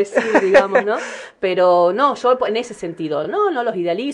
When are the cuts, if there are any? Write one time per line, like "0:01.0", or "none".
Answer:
none